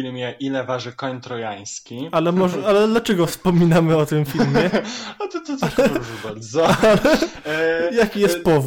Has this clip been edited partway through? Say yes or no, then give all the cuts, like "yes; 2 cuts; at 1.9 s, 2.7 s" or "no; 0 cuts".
no; 0 cuts